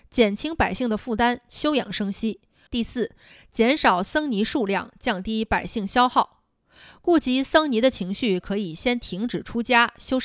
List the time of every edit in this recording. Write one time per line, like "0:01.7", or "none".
0:02.7